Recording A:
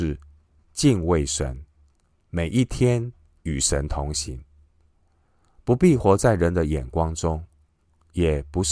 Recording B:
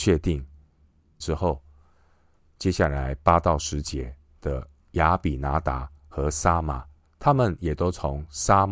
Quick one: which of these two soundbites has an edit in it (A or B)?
B